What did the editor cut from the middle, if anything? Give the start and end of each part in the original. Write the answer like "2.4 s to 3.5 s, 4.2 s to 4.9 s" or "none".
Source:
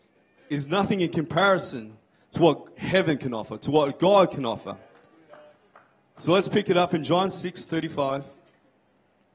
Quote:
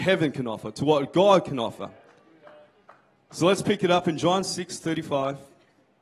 none